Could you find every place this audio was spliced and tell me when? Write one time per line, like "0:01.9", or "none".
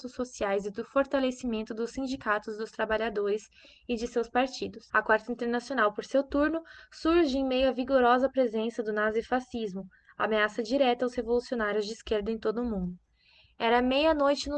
0:04.9